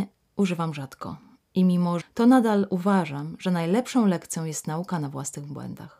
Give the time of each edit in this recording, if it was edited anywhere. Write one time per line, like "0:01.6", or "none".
0:02.0

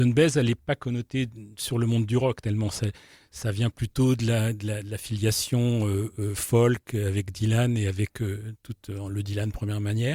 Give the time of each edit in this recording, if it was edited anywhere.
none

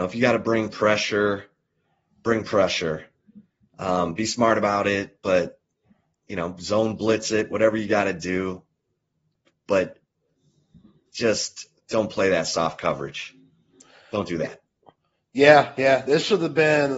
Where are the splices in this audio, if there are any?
none

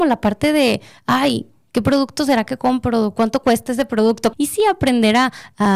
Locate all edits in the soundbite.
0:04.3

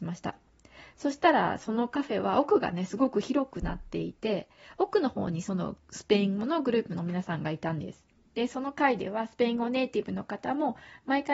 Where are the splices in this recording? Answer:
0:08.2

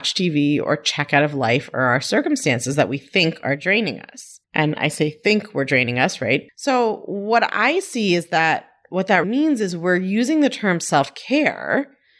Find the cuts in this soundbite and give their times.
0:04.4
0:06.5
0:09.2

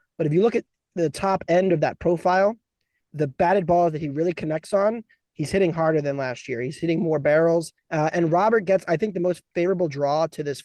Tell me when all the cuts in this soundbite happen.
0:07.8

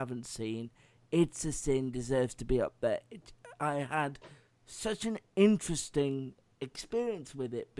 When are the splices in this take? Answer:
none

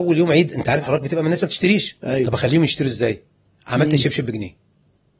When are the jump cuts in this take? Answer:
none

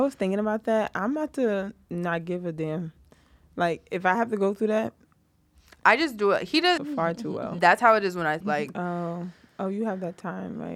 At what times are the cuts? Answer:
0:06.8
0:08.4

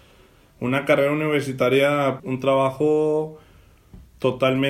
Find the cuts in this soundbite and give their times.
0:02.2

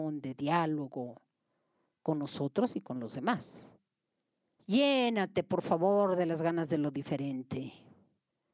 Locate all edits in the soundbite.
0:04.6

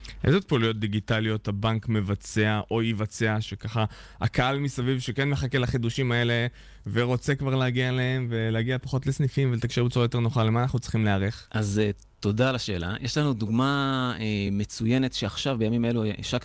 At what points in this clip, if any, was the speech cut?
none

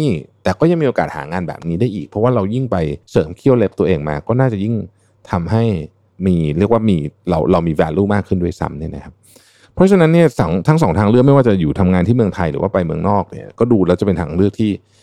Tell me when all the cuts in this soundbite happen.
0:03.0

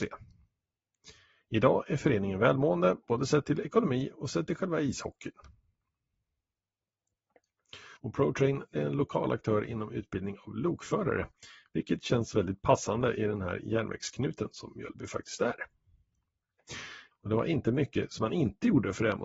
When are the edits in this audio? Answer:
0:08.0
0:17.1

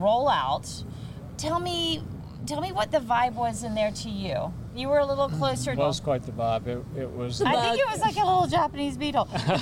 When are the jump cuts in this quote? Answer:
0:05.8
0:07.4

